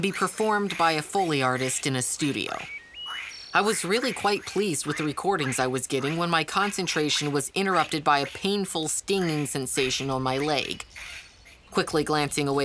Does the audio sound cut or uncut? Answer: uncut